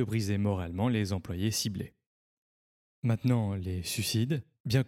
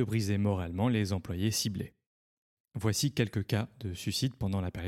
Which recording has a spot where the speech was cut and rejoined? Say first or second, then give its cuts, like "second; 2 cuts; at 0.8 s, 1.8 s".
second; 1 cut; at 2.6 s